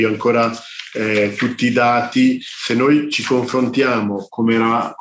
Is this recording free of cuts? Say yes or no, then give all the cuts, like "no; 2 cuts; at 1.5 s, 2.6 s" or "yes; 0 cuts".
yes; 0 cuts